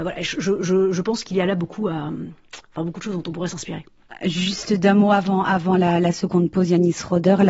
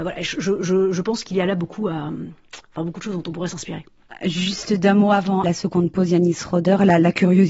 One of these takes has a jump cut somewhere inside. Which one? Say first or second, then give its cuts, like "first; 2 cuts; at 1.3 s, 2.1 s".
second; 1 cut; at 5.4 s